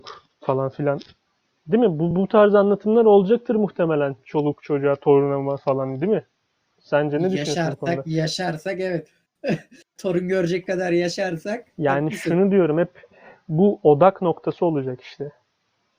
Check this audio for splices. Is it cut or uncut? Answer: uncut